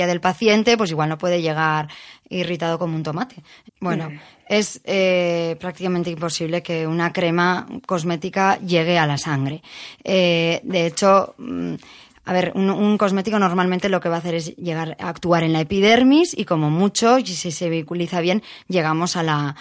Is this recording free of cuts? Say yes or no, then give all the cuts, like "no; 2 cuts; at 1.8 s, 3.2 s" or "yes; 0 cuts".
no; 1 cut; at 3.7 s